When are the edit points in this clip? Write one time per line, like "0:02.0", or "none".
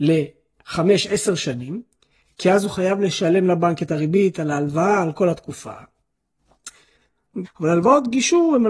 0:07.4